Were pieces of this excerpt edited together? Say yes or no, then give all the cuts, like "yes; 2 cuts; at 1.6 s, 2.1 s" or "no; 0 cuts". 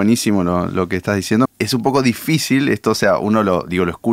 yes; 1 cut; at 1.5 s